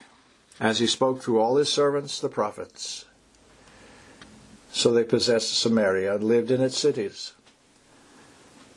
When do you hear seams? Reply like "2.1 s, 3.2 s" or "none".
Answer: 4.6 s

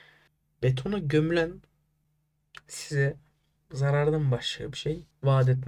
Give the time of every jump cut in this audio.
none

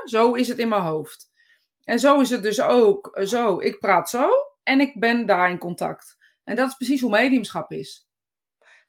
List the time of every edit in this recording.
none

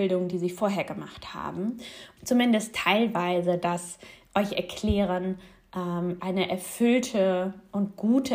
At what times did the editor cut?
2.2 s, 6.2 s

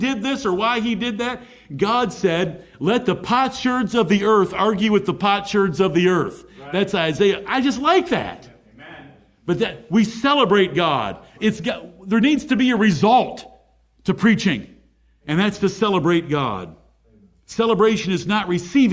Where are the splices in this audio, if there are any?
none

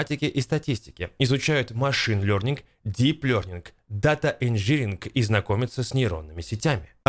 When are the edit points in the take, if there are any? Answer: none

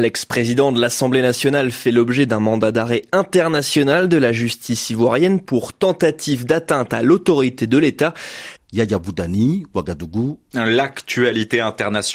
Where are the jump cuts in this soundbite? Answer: 8.6 s, 10.5 s

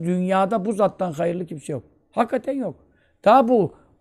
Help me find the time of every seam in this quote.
none

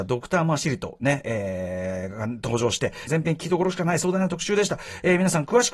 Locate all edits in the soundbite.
3.1 s

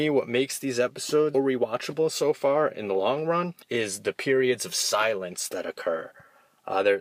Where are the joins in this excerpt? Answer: 1.3 s, 3.6 s

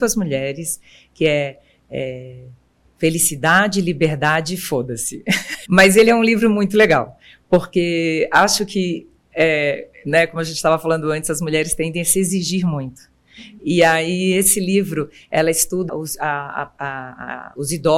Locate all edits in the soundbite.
5.7 s, 15.9 s

